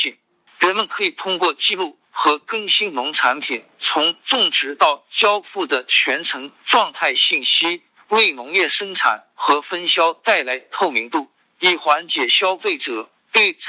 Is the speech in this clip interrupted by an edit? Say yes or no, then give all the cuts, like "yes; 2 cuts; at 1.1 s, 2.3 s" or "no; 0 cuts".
no; 0 cuts